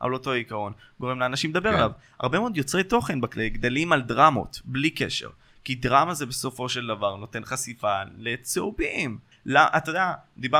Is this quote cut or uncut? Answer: cut